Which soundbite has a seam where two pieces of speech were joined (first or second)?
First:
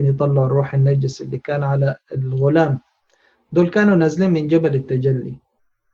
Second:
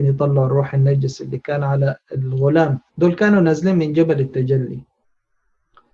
second